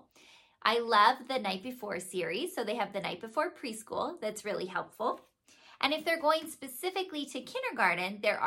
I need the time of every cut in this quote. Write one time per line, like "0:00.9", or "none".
none